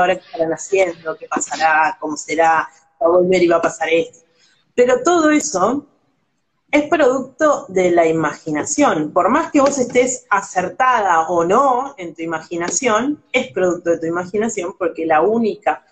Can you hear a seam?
no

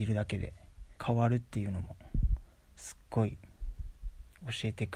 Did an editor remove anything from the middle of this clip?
yes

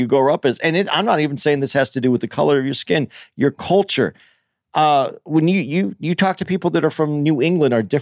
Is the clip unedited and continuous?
yes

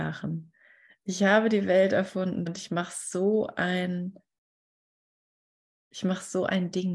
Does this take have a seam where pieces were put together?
yes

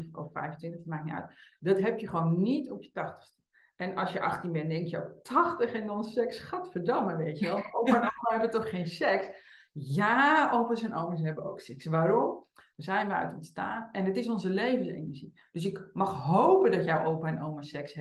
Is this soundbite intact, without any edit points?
no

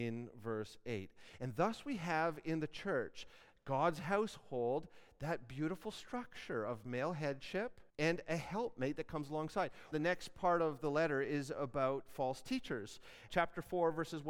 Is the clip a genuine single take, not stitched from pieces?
no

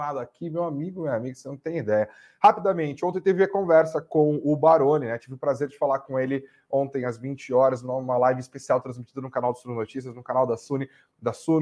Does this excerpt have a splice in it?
no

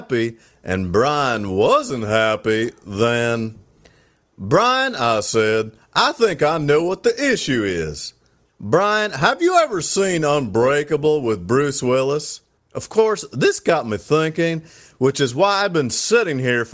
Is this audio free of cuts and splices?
no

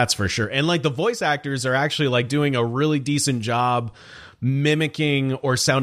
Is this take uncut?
yes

